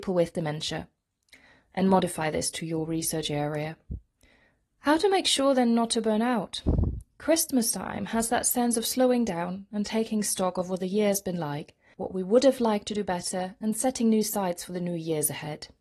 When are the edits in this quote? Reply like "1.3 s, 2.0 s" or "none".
11.9 s